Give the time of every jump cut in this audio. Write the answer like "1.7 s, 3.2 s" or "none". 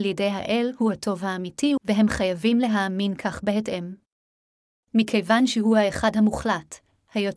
1.8 s, 4.8 s